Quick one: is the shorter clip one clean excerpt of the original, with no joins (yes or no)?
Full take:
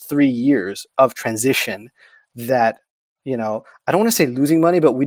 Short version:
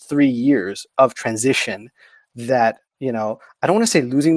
no